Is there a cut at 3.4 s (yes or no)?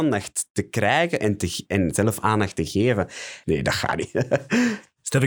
yes